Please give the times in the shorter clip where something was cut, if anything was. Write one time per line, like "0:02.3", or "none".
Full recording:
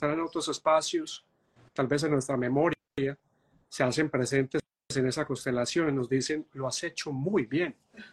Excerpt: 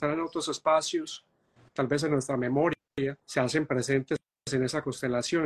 0:03.2